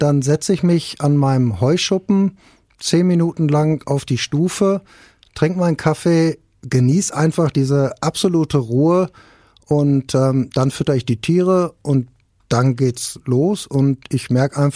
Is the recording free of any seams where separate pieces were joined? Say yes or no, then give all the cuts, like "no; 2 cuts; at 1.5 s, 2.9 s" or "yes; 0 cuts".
yes; 0 cuts